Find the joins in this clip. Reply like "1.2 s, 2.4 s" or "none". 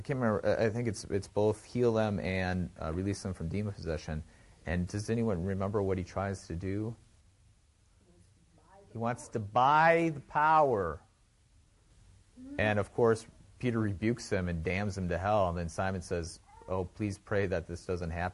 none